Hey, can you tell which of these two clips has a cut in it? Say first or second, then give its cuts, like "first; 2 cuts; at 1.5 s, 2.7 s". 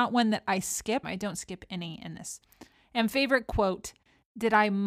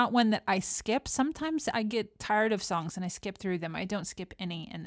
first; 1 cut; at 1.0 s